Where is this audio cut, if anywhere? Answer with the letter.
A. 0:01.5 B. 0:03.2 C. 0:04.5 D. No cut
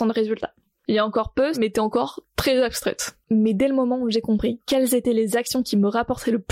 A